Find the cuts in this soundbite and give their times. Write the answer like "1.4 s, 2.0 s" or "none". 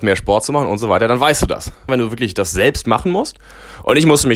1.9 s

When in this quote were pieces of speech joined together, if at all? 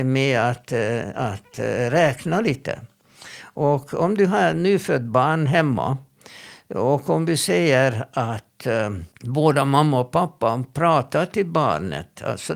9.1 s

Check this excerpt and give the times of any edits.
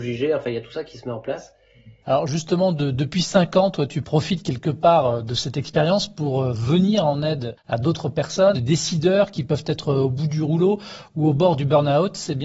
2.0 s, 8.5 s

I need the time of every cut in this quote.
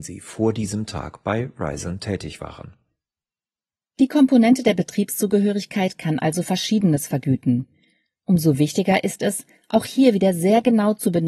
none

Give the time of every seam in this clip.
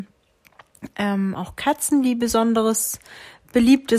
1.3 s

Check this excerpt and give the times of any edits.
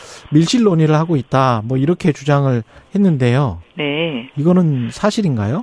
3.7 s

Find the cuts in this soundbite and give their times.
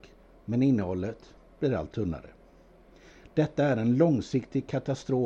none

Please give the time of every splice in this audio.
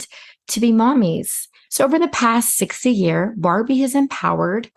1.7 s

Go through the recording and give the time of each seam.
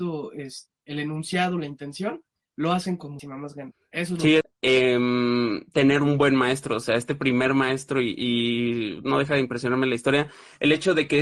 4.4 s

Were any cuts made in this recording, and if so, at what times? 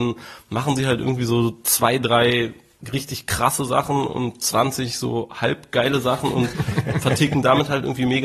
none

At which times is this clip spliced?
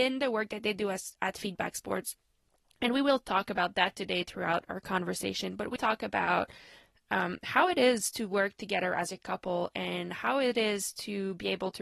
5.8 s

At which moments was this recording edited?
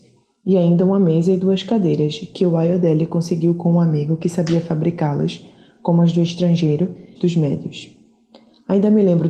7.2 s

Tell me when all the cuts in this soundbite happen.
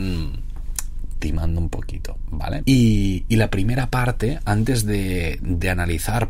2.6 s

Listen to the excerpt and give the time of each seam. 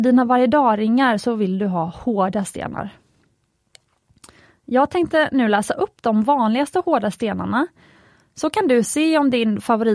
none

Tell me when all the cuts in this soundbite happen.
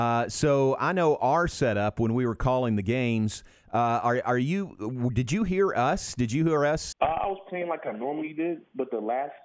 6.9 s

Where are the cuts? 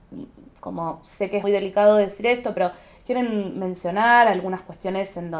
1.4 s

